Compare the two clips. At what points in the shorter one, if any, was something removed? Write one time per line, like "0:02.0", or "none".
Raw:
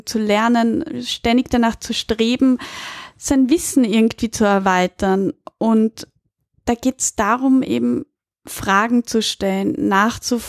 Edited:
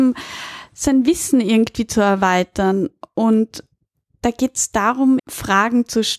0:05.2